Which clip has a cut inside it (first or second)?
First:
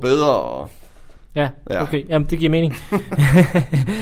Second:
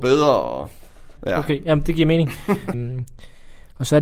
second